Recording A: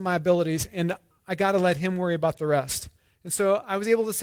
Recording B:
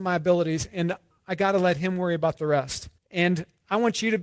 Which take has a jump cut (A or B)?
B